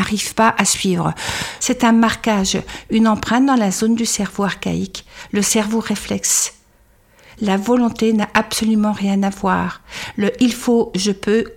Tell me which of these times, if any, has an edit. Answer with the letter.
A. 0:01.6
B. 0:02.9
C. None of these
A